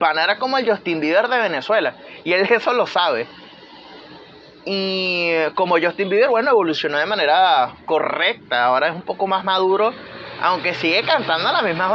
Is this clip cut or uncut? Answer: uncut